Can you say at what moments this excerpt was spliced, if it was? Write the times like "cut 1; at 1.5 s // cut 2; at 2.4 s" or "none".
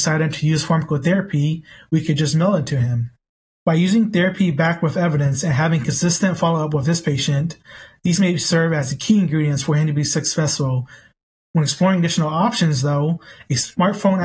none